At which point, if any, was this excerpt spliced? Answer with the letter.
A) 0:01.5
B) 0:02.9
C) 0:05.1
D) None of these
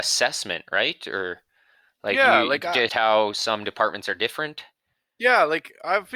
B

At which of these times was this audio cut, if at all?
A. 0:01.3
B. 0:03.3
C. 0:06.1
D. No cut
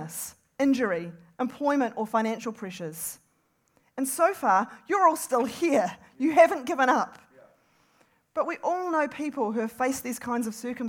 A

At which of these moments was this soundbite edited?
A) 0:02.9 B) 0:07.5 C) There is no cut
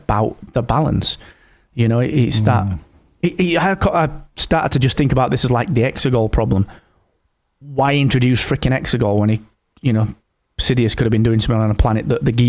C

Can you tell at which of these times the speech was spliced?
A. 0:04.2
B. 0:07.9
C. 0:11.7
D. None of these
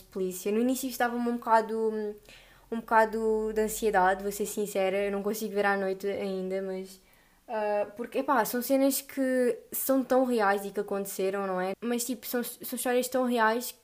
C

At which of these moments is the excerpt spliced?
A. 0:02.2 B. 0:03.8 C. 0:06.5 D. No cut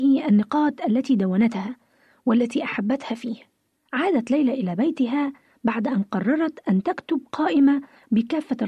B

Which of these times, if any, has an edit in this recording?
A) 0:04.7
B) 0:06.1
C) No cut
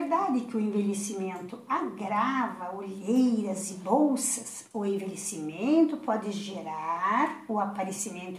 A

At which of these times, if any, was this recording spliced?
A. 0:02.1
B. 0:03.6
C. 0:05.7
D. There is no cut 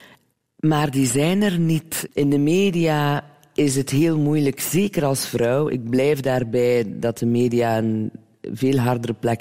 D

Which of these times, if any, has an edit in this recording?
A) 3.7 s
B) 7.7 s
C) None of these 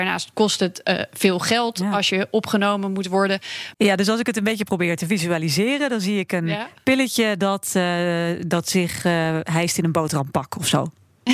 A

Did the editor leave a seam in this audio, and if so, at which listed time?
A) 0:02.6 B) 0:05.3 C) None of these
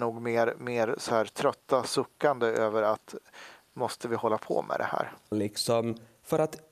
B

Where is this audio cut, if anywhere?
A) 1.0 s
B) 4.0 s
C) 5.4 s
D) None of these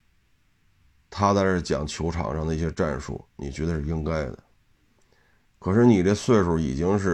C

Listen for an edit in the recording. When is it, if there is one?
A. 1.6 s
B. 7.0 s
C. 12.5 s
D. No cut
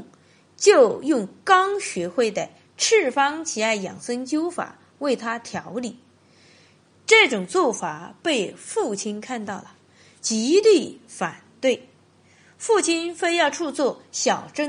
D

